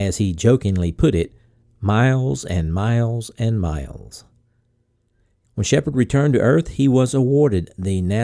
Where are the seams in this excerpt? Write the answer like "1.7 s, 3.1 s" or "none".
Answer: 5.5 s